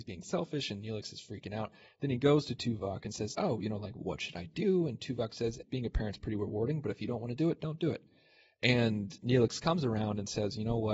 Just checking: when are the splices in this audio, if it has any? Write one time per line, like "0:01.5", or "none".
0:03.3
0:05.6